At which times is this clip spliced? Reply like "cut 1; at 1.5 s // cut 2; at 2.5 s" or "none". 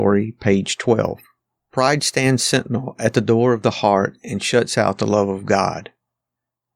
cut 1; at 1.6 s